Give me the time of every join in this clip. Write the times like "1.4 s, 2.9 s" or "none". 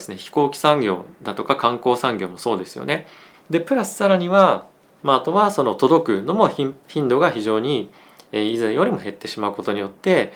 3.3 s, 5.0 s